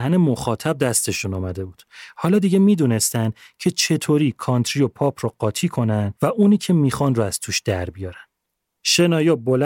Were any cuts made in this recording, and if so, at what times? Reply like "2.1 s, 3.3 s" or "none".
8.7 s